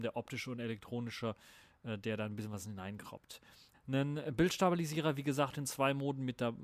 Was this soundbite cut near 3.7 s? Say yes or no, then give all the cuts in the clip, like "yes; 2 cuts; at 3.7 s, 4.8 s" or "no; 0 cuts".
yes; 1 cut; at 3.7 s